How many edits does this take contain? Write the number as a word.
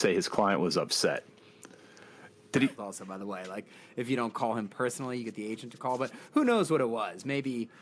one